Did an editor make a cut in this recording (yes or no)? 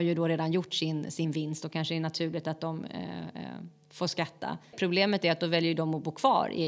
yes